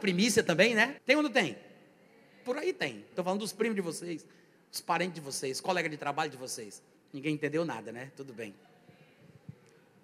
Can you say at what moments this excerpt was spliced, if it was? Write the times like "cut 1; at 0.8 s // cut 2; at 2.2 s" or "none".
cut 1; at 1.0 s // cut 2; at 3.1 s // cut 3; at 6.9 s